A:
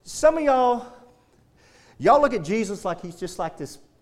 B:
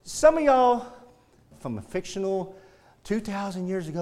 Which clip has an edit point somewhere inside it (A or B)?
B